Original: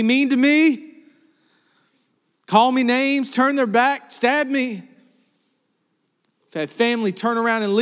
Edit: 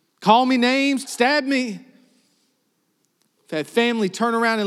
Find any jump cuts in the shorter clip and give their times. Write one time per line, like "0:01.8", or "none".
0:01.0